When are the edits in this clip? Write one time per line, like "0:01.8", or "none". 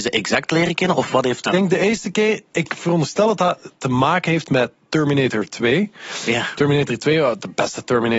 0:01.4